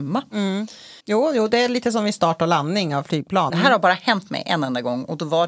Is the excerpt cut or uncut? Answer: cut